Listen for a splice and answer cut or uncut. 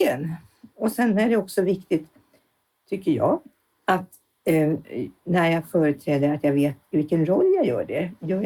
uncut